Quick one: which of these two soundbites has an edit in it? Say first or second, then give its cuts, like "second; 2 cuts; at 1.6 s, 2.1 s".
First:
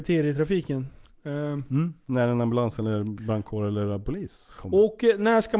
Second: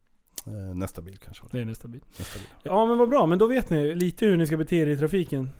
second; 2 cuts; at 2.6 s, 3.9 s